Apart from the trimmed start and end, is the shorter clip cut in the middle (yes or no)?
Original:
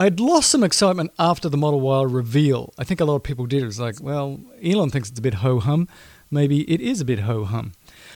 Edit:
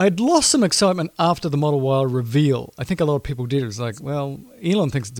no